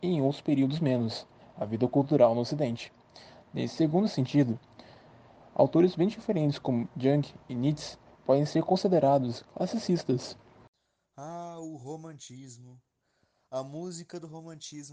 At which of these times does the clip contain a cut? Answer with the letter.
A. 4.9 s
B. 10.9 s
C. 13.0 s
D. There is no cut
D